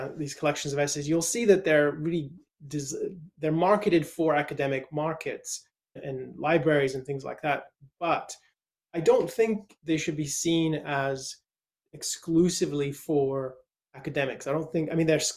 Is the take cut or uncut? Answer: cut